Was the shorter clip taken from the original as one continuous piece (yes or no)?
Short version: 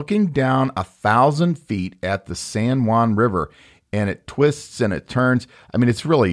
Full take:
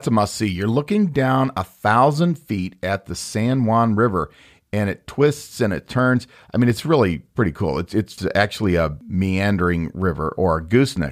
yes